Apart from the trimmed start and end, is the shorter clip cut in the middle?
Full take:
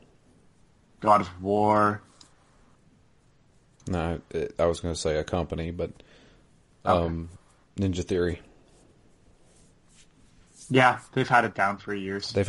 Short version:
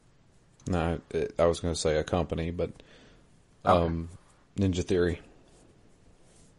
no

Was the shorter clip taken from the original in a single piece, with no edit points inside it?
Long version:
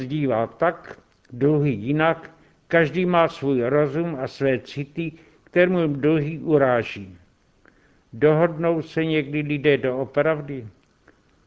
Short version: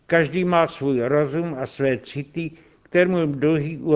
yes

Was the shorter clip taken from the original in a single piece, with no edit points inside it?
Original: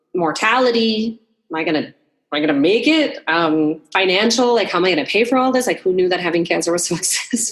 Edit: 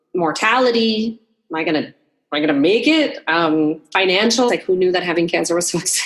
no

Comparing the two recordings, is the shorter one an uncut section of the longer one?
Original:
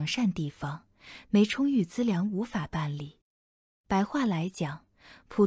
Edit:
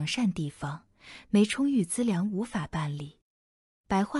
yes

